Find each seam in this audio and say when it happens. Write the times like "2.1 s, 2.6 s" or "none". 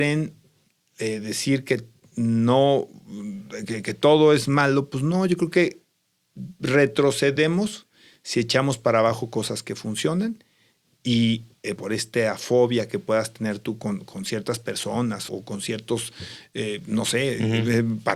11.8 s, 15.3 s